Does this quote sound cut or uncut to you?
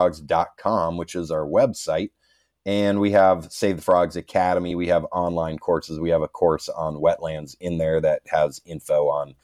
uncut